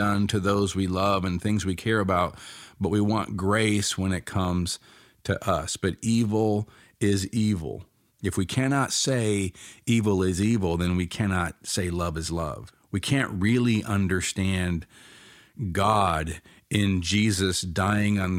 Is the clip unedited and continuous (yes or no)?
yes